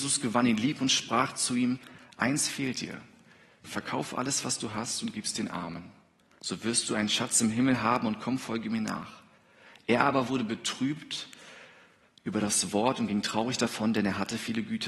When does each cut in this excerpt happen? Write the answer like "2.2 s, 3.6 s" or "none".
3.6 s